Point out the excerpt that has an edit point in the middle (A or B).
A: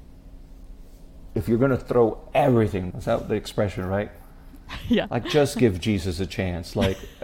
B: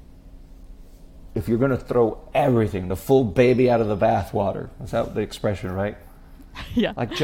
A